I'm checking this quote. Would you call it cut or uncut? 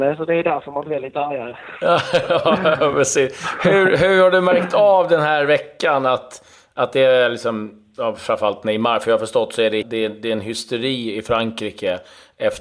cut